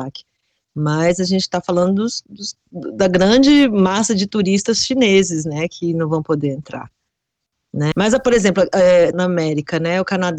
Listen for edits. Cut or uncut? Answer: cut